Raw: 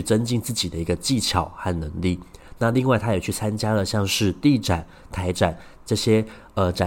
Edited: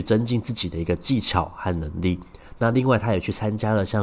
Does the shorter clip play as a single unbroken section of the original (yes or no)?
yes